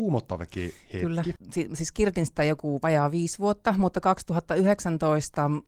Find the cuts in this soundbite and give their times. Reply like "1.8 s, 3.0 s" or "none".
none